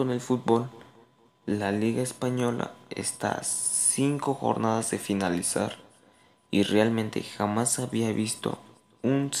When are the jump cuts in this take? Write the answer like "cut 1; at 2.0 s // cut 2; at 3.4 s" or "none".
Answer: none